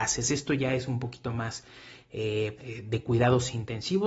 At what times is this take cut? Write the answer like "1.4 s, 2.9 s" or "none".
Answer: 2.6 s